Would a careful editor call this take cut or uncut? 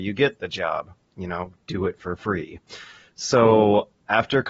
uncut